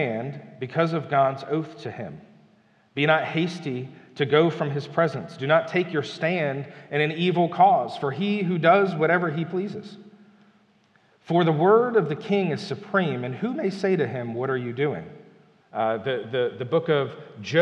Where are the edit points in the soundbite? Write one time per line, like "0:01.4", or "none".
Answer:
0:15.6